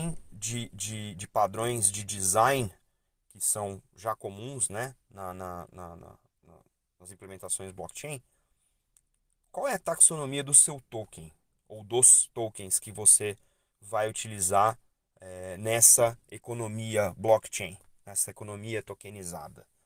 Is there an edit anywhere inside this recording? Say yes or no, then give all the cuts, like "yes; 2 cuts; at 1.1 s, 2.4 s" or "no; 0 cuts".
no; 0 cuts